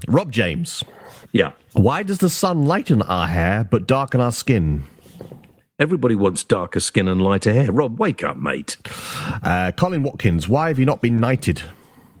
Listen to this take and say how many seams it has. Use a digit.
0